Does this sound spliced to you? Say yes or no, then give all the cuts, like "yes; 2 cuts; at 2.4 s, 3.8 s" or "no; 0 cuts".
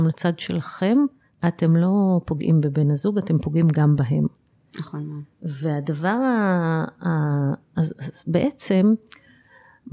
no; 0 cuts